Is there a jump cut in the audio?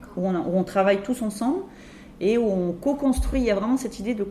no; 0 cuts

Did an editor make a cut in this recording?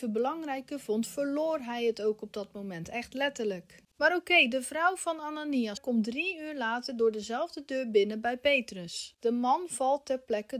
yes; 2 cuts; at 5.8 s, 9.2 s

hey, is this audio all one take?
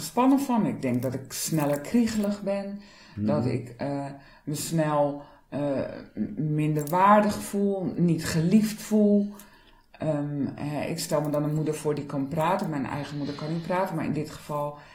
yes; 0 cuts

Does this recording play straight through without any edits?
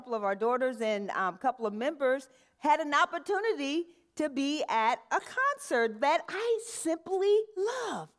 yes; 0 cuts

